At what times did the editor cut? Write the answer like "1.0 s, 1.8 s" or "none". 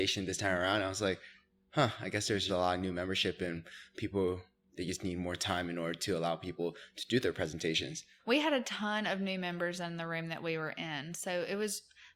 2.5 s